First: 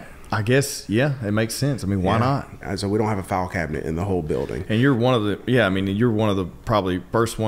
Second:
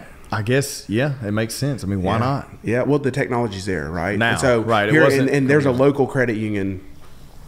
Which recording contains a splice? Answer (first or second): first